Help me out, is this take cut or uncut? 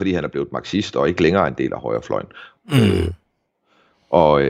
cut